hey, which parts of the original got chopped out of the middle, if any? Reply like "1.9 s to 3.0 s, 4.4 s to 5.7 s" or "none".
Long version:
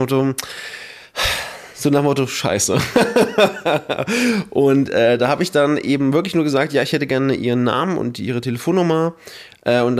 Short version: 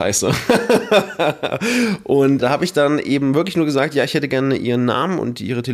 4.9 s to 5.2 s